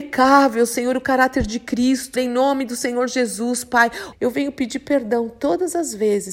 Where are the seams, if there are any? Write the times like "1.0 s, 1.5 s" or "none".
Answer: 2.2 s, 4.1 s